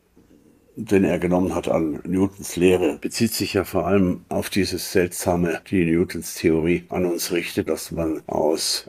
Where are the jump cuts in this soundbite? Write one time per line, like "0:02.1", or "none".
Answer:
0:05.6
0:07.7

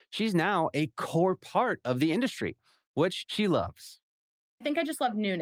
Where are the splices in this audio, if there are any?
0:03.2

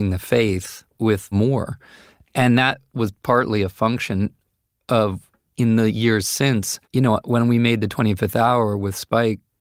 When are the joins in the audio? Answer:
0:06.8

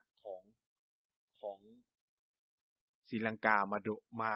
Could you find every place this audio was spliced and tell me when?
none

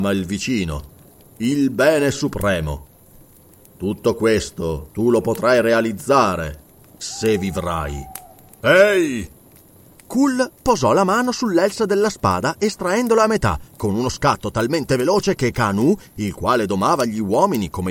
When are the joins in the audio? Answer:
none

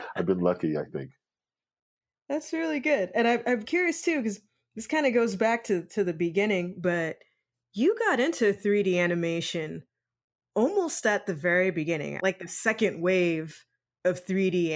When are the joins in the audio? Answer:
0:12.2

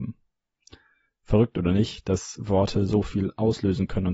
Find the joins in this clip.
none

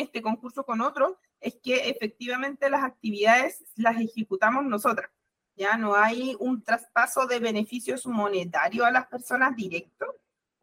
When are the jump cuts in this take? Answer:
none

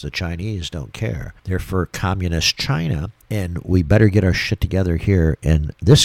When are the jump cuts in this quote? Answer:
0:01.4
0:03.2

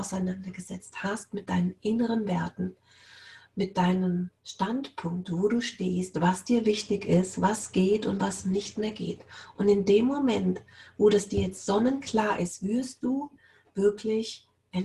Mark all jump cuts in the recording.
0:04.4

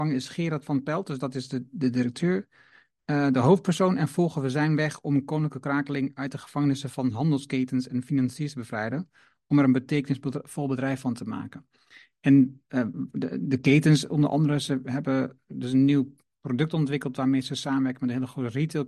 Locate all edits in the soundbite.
none

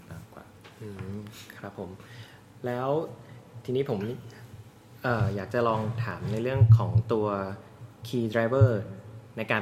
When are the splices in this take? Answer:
none

